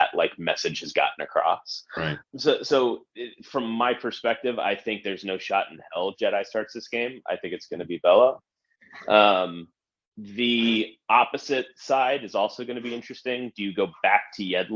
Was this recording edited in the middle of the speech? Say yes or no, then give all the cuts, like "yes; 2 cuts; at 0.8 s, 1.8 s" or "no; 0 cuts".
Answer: yes; 1 cut; at 2.2 s